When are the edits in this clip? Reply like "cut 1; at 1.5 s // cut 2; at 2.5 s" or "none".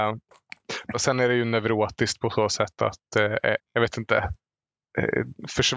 cut 1; at 0.9 s // cut 2; at 3.6 s